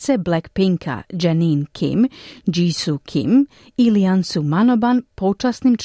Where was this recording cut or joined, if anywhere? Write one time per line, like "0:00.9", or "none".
none